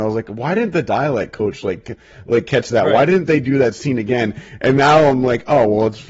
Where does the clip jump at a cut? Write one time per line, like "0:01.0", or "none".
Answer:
none